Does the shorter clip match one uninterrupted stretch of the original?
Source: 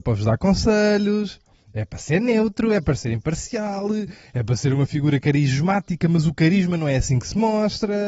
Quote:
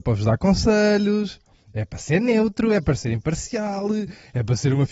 yes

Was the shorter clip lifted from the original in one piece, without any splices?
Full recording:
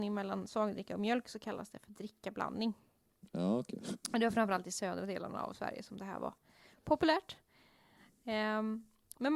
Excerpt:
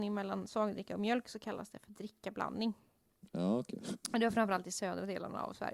yes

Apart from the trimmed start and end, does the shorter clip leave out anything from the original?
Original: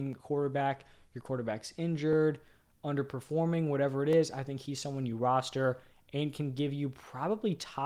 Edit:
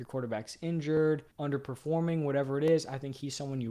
yes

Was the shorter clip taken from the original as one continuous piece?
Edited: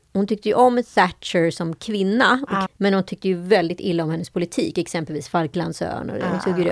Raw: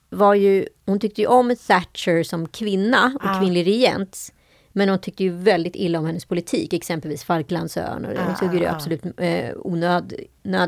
no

